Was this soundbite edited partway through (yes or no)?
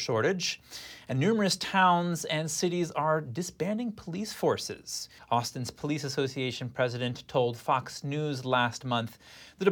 yes